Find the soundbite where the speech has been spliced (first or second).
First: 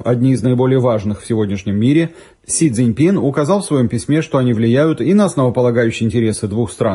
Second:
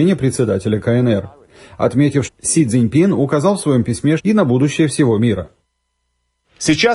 second